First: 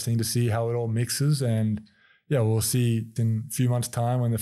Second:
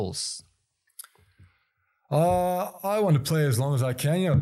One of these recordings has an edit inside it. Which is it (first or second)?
first